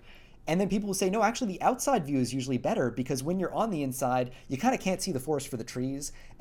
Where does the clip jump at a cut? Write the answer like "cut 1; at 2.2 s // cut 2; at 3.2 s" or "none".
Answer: none

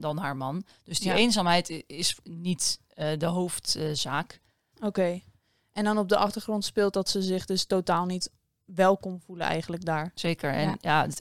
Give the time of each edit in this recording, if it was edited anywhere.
cut 1; at 4.7 s

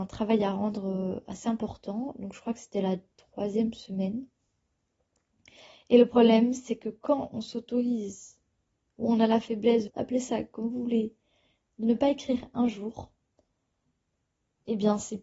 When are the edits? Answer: cut 1; at 9.9 s

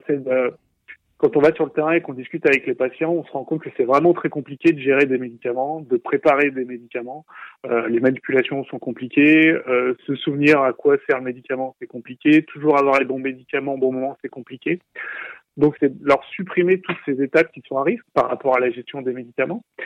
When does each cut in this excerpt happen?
cut 1; at 15.8 s // cut 2; at 18.0 s

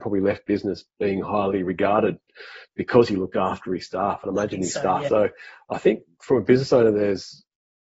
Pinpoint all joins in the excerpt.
cut 1; at 5.1 s

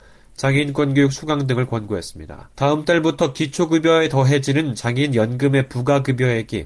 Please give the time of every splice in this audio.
cut 1; at 2.5 s

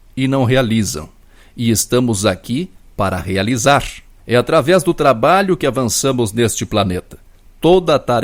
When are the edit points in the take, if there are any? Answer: cut 1; at 4.2 s

